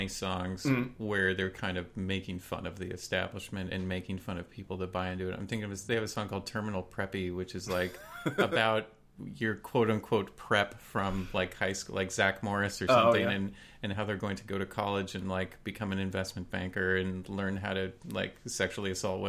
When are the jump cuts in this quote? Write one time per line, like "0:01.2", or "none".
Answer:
none